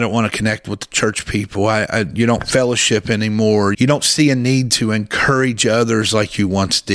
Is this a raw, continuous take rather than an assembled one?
no; 1 cut; at 3.7 s

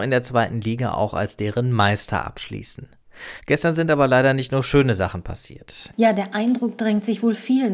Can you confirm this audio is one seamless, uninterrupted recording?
no; 2 cuts; at 3.4 s, 5.9 s

